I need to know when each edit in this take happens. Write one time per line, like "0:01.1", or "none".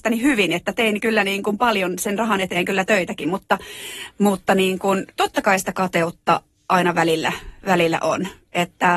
none

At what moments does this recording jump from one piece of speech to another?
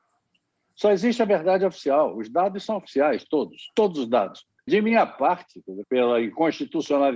0:04.7
0:05.8

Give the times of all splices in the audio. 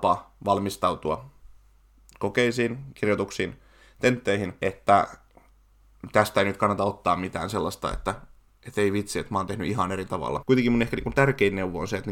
0:10.4

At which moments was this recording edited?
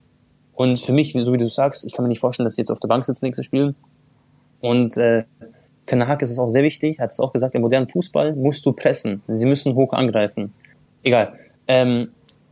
0:10.8

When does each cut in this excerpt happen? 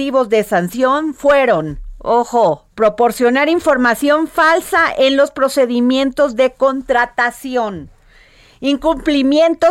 0:02.7

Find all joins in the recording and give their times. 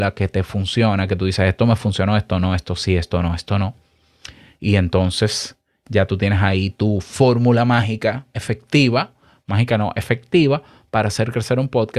none

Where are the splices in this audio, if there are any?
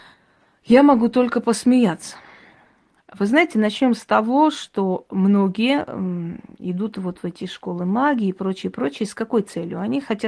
none

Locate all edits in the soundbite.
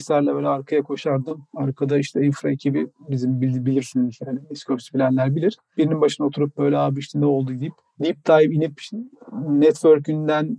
none

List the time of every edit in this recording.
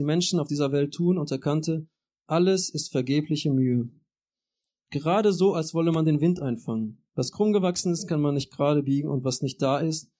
0:07.1

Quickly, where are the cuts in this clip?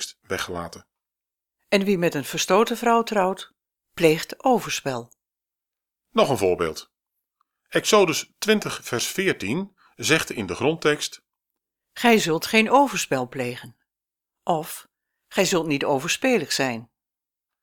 none

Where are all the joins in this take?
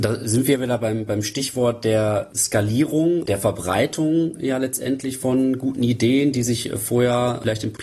0:03.2

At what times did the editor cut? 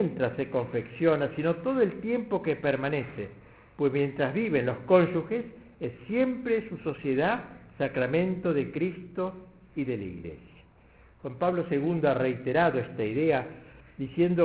none

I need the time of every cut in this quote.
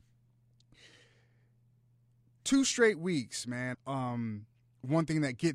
0:03.7

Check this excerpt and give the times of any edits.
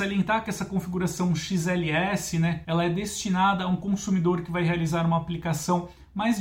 0:02.6

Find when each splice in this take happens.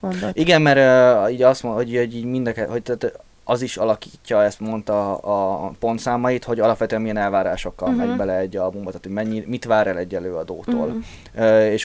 none

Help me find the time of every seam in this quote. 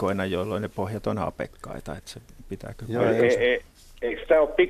none

